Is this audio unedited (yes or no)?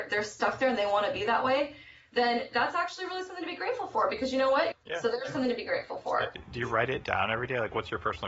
no